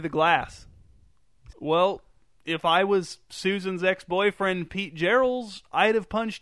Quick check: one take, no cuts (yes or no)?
no